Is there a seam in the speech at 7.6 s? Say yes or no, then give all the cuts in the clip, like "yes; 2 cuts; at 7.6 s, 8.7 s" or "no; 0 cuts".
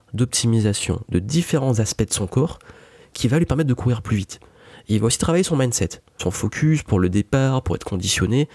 yes; 2 cuts; at 6.2 s, 7.6 s